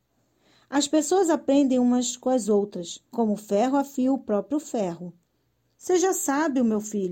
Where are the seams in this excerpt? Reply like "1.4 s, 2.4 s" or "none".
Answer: 3.1 s, 5.8 s

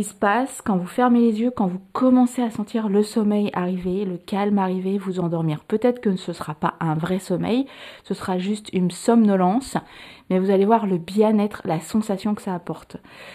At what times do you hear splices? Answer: none

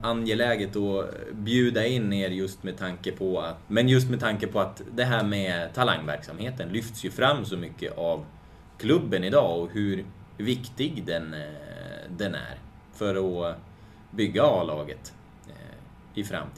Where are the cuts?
3.6 s

